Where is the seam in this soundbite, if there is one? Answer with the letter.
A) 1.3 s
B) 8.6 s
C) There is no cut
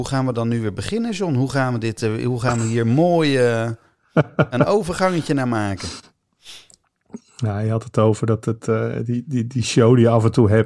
C